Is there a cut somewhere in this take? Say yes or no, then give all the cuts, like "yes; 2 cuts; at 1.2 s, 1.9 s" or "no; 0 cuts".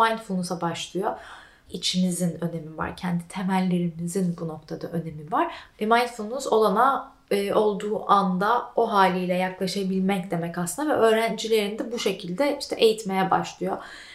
yes; 2 cuts; at 1.7 s, 5.7 s